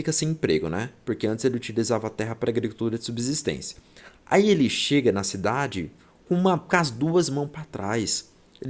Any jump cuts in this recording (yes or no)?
no